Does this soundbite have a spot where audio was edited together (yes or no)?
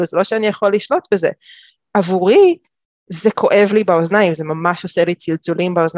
no